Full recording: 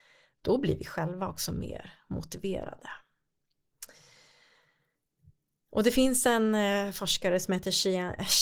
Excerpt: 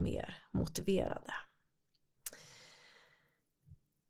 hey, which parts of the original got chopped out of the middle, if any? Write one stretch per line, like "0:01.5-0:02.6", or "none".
none